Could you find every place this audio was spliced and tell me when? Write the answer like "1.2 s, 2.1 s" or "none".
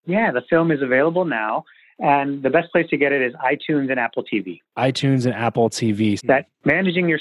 6.2 s